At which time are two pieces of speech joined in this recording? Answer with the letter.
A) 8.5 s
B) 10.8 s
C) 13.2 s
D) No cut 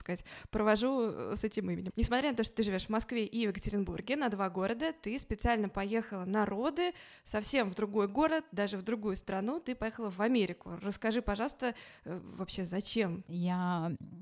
C